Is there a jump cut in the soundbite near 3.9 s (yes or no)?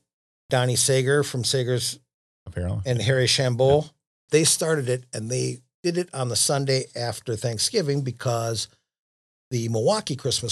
no